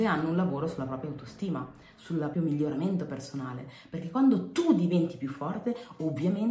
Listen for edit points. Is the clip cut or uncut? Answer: cut